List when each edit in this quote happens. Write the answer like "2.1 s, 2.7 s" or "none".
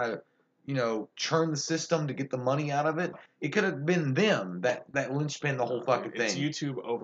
3.1 s